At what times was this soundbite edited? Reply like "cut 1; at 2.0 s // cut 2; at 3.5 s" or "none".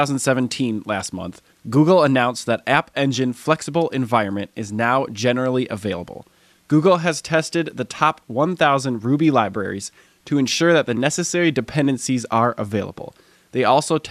cut 1; at 6.5 s // cut 2; at 10.1 s